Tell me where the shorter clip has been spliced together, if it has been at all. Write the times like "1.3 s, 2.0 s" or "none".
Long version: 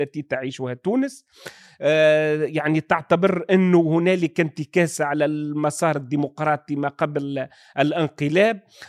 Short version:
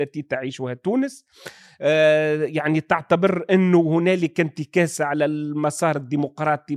none